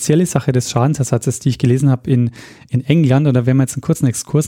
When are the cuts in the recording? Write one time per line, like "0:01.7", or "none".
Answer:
none